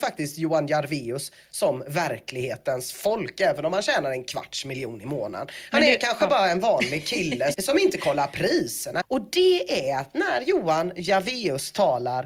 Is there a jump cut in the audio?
yes; 2 cuts; at 7.5 s, 9.0 s

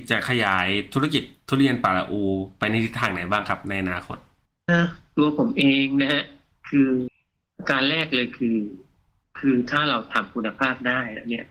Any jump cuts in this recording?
yes; 1 cut; at 4.7 s

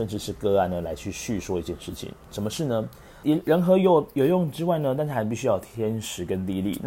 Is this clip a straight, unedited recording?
no; 1 cut; at 3.2 s

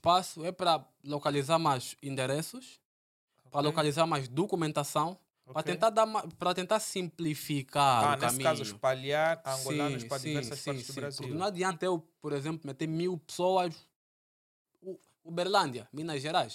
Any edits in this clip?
no; 0 cuts

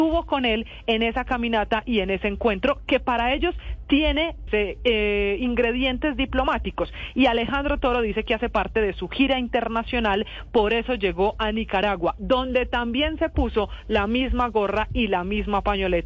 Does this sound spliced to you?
yes; 1 cut; at 4.5 s

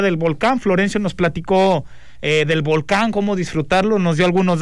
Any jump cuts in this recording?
no; 0 cuts

